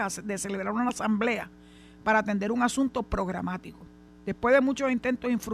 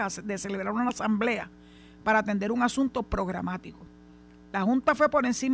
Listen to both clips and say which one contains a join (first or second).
first